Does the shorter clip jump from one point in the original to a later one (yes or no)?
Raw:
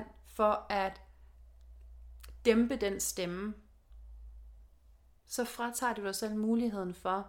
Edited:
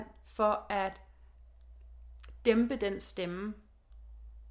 no